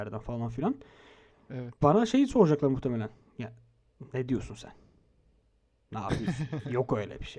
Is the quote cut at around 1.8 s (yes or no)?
yes